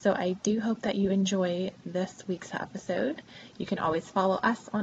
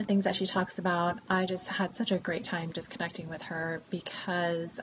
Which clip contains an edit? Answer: first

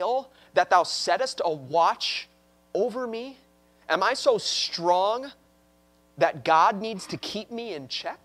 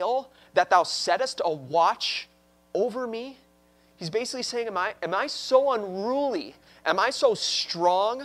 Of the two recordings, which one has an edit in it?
first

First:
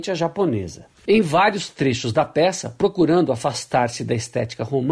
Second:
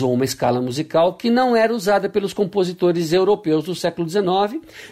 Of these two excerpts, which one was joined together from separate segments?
first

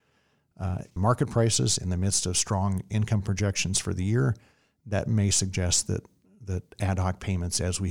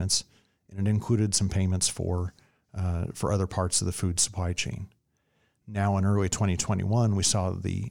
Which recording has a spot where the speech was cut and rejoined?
first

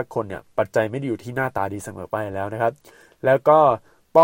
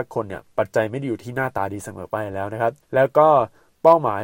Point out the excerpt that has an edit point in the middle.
second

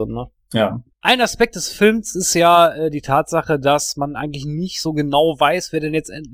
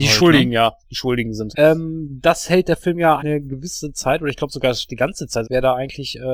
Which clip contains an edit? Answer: second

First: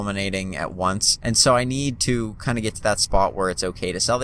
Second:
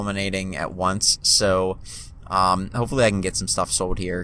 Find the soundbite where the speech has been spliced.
first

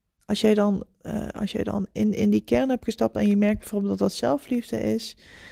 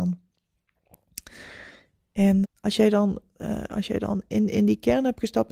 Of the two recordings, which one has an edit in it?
second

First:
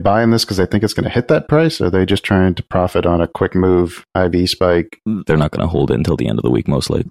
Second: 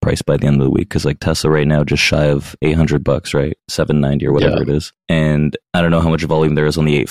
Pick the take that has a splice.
first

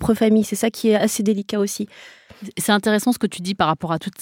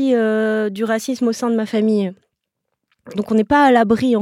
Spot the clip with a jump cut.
second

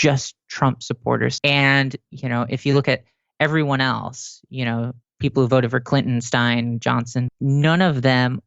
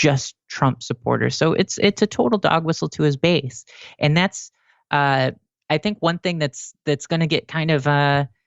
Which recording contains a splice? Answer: first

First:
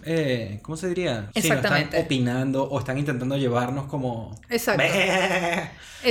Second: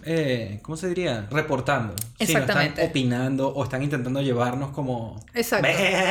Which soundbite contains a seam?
first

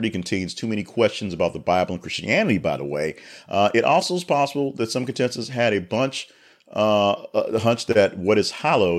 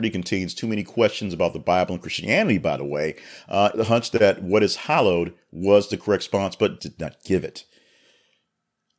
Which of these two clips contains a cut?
second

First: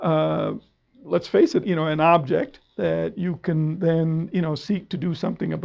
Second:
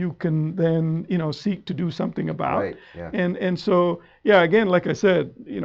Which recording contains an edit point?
first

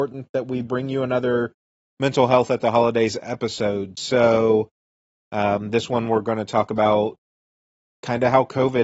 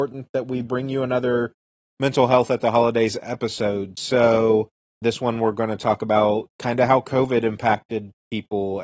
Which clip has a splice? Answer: second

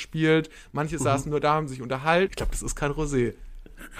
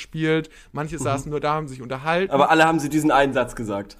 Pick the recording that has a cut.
first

